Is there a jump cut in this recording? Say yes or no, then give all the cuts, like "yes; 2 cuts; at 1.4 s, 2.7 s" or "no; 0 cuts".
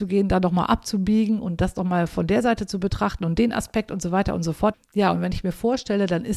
yes; 1 cut; at 4.7 s